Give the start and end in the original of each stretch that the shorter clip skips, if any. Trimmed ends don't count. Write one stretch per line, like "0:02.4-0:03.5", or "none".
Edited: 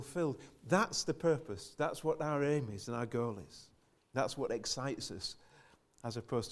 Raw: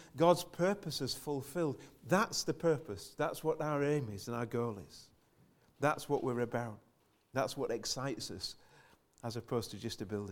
0:05.4-0:07.2